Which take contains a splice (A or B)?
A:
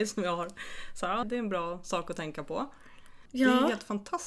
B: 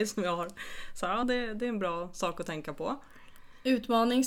A